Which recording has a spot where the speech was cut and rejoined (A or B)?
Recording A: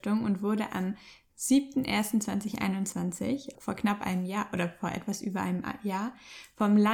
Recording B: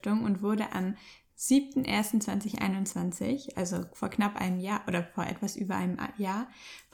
A